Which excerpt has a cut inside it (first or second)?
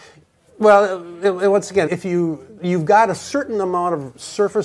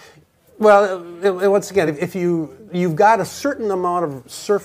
first